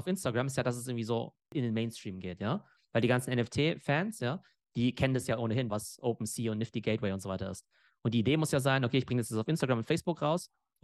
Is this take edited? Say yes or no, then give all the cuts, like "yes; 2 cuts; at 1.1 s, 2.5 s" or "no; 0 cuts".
yes; 1 cut; at 5.7 s